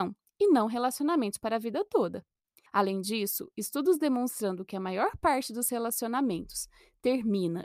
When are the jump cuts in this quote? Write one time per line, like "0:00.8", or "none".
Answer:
0:02.7